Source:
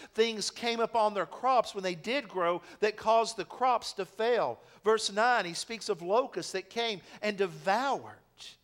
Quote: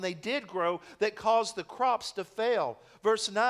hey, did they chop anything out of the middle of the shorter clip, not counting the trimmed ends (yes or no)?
no